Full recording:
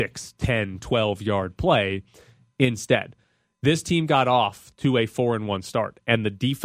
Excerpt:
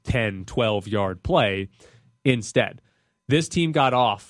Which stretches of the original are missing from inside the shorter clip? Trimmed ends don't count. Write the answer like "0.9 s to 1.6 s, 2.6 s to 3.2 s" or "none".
none